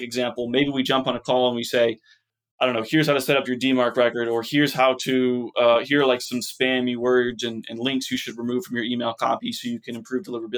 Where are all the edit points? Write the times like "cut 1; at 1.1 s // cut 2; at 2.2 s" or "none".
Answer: none

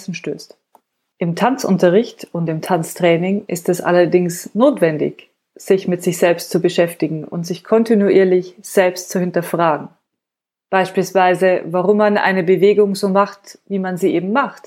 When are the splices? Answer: cut 1; at 1.1 s

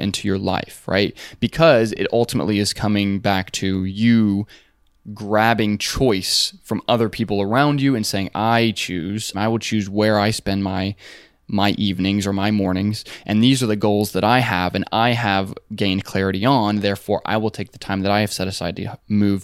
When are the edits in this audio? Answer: cut 1; at 9.3 s

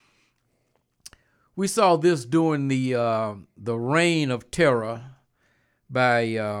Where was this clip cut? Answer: none

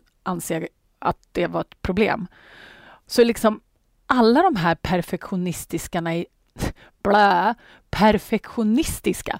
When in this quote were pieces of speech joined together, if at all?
none

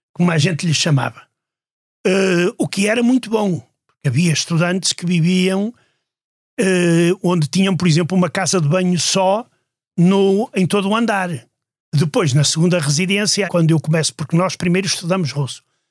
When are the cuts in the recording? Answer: cut 1; at 11.8 s // cut 2; at 13.5 s

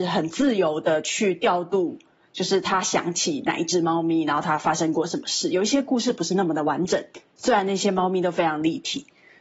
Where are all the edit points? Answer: none

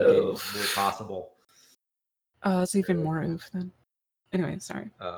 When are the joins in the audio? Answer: none

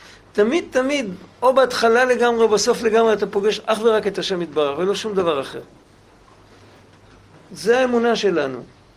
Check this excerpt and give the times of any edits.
none

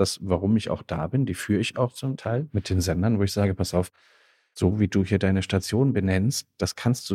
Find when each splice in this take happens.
none

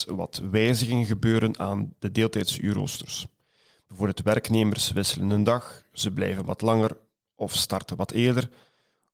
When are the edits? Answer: none

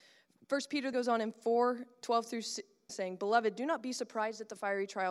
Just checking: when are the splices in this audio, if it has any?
cut 1; at 0.9 s // cut 2; at 2.9 s

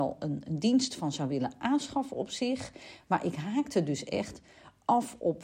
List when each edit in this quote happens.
none

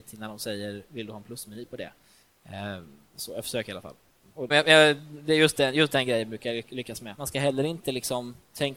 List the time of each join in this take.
cut 1; at 4.5 s // cut 2; at 7.2 s

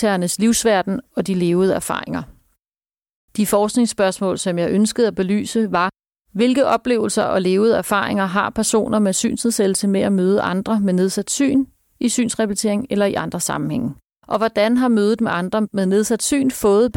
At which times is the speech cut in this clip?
cut 1; at 14.2 s

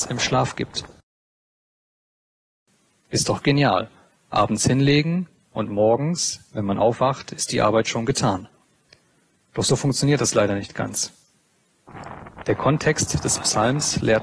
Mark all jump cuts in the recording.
none

